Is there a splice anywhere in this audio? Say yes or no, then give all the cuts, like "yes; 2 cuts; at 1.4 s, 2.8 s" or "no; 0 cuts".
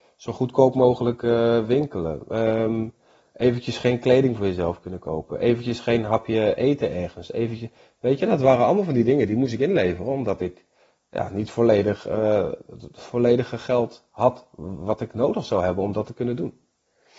no; 0 cuts